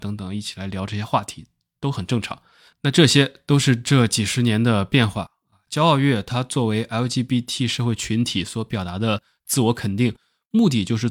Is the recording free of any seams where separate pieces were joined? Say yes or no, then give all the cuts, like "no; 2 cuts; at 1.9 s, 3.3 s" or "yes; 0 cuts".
yes; 0 cuts